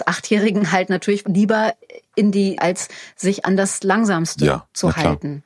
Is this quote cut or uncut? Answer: cut